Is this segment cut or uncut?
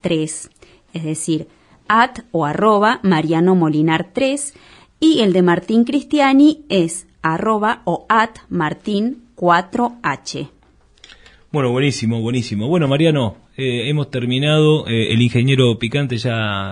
uncut